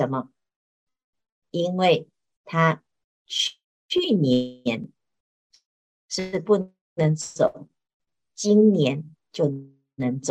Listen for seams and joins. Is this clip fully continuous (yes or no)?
yes